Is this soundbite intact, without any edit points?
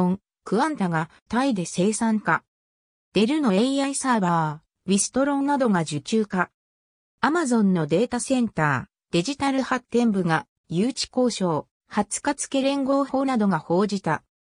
no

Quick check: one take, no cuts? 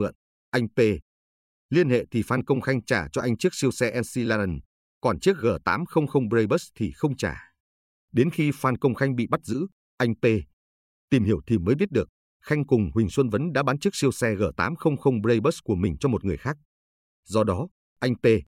yes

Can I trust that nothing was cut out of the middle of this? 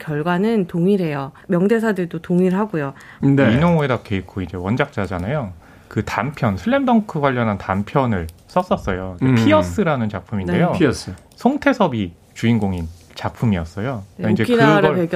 no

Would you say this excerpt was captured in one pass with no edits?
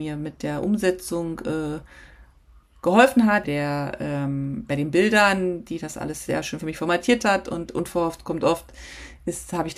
no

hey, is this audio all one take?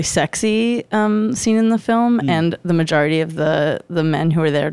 yes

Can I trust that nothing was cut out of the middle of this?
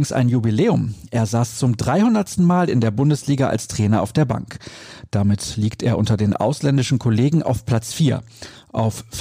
yes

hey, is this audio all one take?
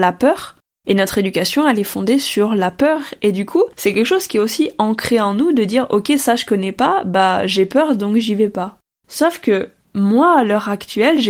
yes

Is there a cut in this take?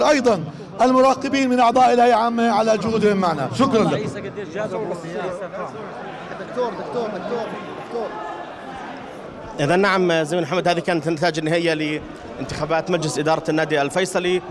no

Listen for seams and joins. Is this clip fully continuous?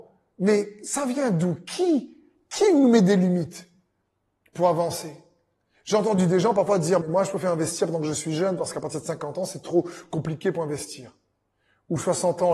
yes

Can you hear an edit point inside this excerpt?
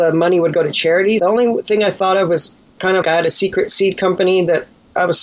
yes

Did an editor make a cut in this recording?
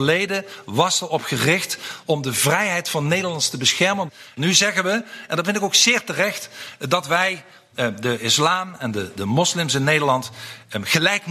no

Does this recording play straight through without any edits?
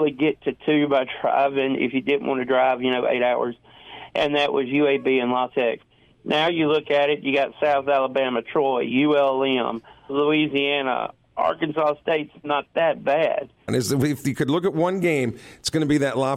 no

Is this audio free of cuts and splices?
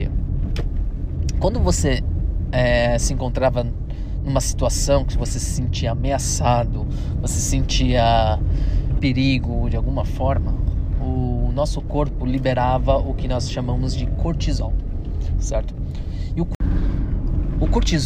no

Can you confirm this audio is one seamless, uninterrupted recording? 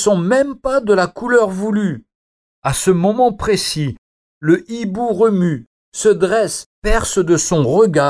no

